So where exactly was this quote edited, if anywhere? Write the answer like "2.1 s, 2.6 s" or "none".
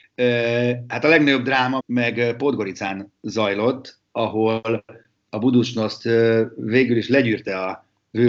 1.8 s

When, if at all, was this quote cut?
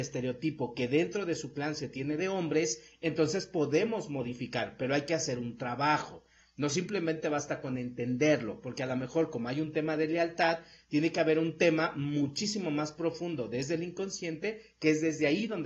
none

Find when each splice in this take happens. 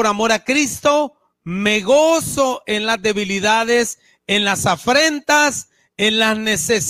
none

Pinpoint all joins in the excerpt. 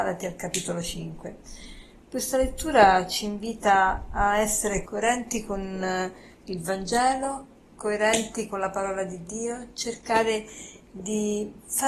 2.0 s, 4.9 s

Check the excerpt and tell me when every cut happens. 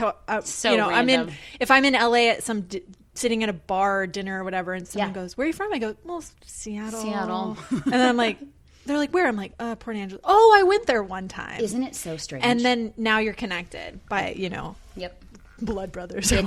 6.4 s

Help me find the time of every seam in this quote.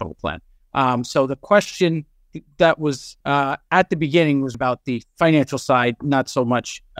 3.2 s, 4.5 s

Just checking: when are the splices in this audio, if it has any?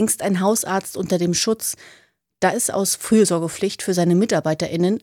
2.5 s

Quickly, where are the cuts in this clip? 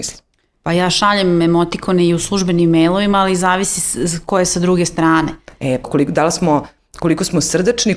5.8 s

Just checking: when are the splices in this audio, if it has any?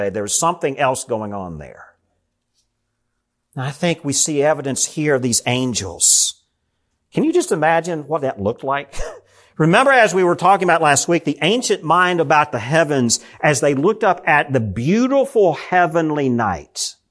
none

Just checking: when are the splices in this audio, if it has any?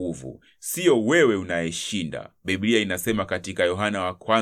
2.4 s

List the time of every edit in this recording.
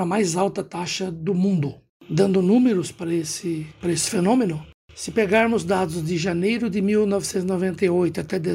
1.9 s

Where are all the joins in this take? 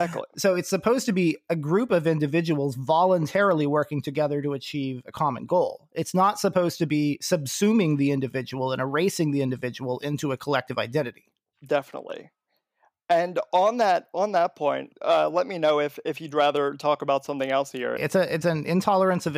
14.9 s, 18.0 s

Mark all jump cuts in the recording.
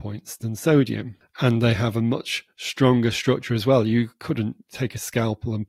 none

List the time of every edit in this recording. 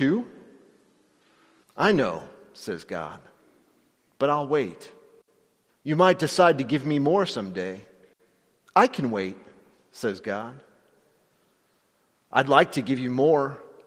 1.6 s, 5.7 s

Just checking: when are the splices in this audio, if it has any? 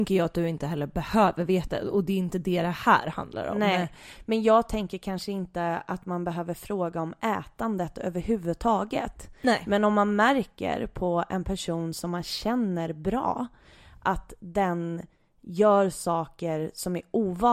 none

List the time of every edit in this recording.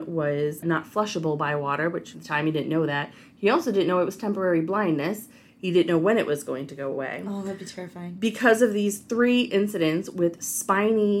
2.1 s

